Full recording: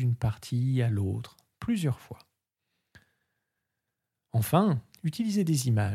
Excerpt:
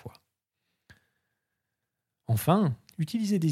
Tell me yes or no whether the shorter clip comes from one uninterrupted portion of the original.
yes